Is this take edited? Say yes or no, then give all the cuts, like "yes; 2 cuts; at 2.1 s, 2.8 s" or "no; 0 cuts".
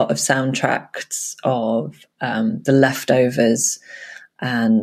no; 0 cuts